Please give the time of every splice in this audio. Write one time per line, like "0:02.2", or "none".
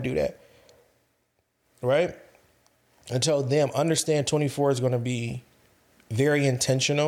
none

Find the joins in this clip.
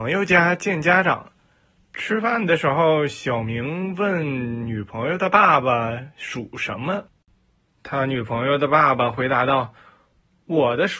none

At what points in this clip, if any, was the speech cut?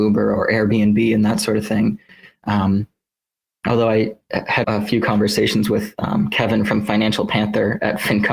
0:04.6

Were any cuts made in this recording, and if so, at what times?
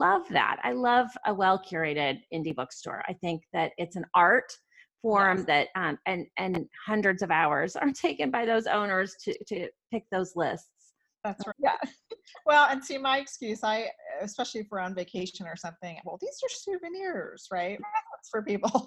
0:11.5
0:16.0
0:17.8

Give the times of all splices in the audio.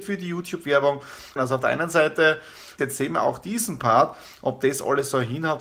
0:01.4
0:02.8

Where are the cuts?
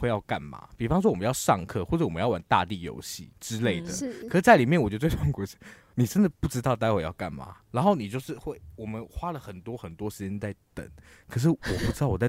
none

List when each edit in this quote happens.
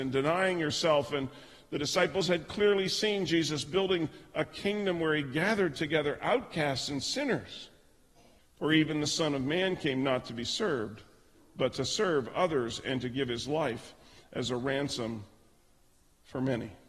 0:08.4

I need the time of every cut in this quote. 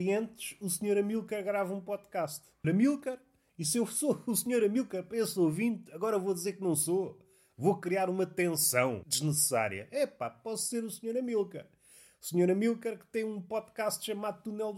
0:02.6

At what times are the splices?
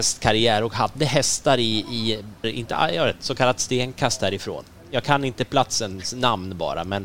0:02.4

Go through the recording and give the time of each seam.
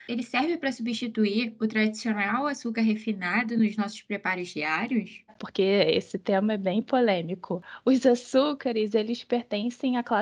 0:05.3

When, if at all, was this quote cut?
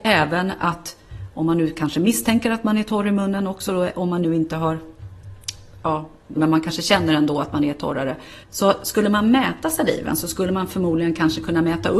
0:06.4
0:08.4

